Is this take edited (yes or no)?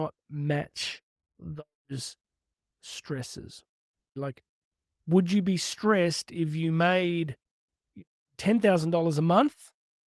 yes